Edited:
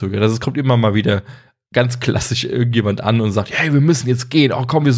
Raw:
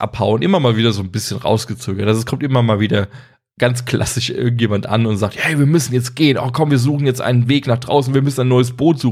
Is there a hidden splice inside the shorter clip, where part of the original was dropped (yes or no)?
no